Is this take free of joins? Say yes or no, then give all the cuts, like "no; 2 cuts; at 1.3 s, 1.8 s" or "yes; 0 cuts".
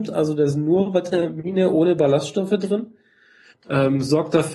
no; 1 cut; at 3.5 s